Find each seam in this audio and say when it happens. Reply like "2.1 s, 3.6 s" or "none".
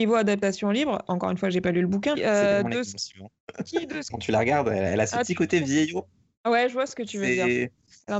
2.2 s, 4.1 s